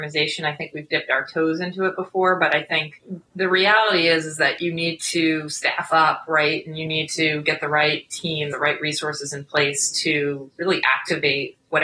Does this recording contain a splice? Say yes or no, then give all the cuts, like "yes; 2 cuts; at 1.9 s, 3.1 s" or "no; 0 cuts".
yes; 1 cut; at 8.5 s